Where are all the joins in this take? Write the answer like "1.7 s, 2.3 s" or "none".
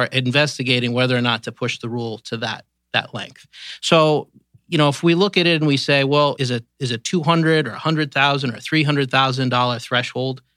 6.4 s